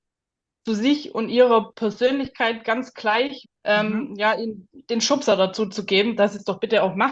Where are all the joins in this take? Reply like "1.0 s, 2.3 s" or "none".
3.4 s